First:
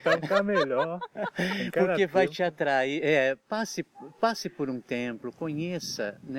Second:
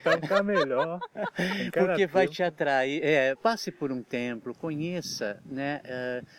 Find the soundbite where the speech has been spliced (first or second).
second